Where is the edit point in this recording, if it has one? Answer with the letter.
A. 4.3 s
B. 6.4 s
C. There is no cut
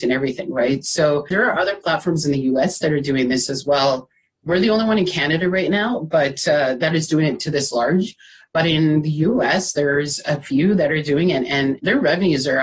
C